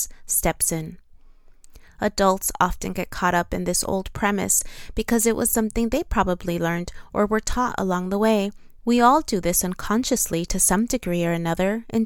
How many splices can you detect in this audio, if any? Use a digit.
1